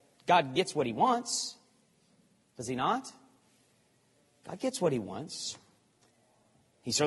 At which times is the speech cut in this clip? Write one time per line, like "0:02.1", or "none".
none